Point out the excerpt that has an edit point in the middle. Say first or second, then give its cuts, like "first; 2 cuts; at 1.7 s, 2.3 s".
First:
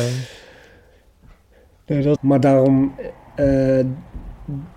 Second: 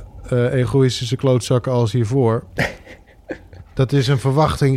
first; 1 cut; at 2.2 s